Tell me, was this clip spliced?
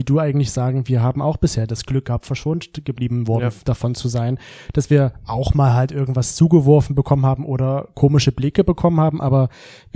no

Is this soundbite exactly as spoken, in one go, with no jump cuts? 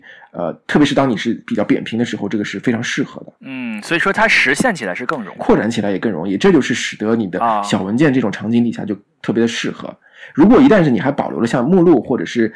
no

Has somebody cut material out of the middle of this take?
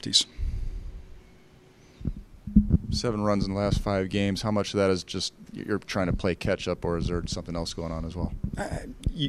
no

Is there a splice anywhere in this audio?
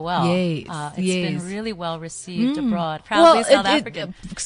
yes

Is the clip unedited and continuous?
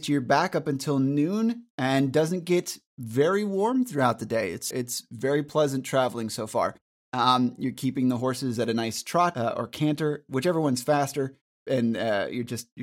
no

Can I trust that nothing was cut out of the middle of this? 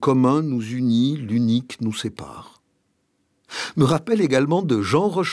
yes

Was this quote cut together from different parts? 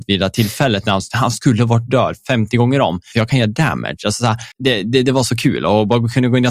yes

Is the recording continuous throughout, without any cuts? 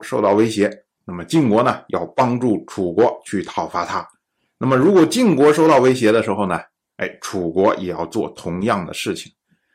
yes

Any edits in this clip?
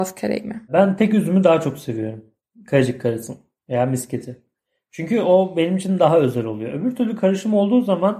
no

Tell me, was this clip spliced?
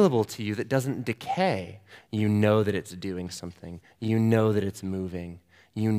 yes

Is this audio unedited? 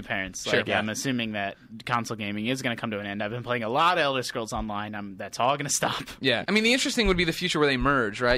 no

